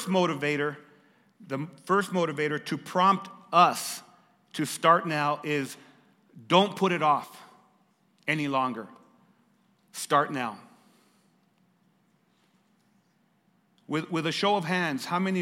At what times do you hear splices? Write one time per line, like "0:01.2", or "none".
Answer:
none